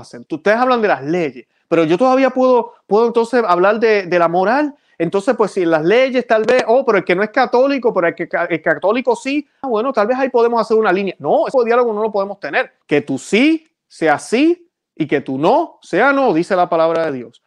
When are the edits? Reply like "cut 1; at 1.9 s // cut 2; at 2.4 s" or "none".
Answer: cut 1; at 9.6 s // cut 2; at 11.5 s // cut 3; at 12.8 s